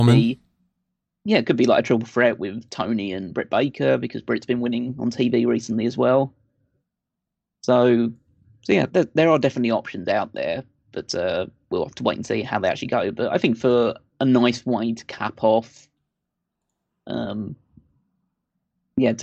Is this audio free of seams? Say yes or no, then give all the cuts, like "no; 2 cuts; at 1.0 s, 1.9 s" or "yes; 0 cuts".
no; 1 cut; at 8.9 s